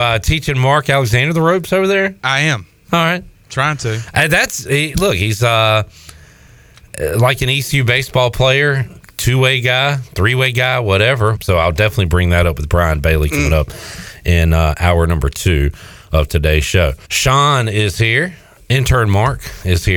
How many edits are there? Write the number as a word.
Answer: two